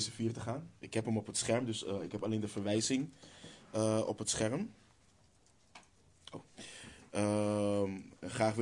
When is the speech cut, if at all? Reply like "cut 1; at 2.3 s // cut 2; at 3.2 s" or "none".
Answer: none